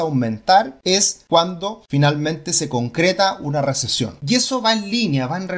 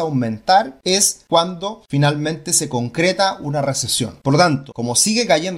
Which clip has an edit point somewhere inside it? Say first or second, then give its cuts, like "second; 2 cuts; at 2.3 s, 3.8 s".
first; 1 cut; at 4.2 s